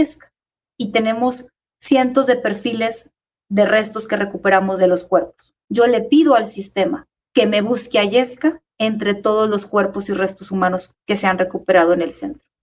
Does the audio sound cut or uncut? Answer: cut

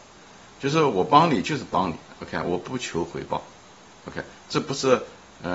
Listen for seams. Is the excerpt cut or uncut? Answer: uncut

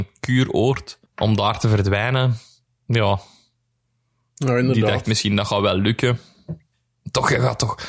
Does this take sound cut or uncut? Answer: cut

